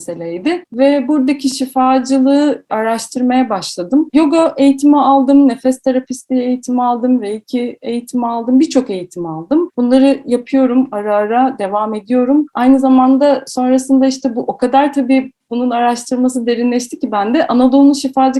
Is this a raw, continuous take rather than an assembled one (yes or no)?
no